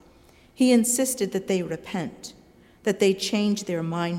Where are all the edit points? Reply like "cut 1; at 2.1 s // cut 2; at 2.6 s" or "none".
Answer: none